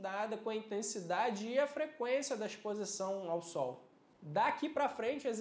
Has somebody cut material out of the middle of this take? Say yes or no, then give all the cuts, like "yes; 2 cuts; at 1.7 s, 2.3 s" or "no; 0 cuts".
yes; 1 cut; at 4.1 s